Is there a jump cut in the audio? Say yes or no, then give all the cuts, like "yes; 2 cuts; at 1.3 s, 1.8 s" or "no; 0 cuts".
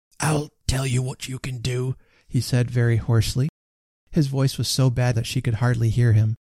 yes; 1 cut; at 5.1 s